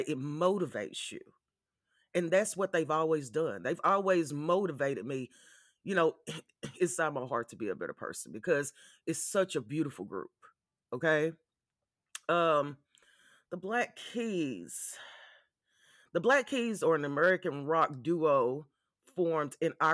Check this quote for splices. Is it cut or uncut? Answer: uncut